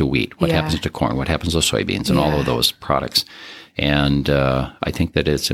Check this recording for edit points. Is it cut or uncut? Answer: uncut